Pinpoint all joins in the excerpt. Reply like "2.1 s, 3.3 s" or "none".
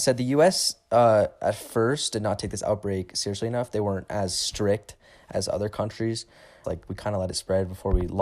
6.6 s